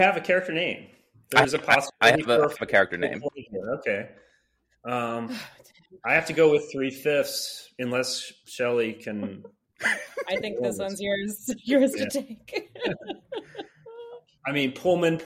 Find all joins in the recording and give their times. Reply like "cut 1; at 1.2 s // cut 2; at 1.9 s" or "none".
none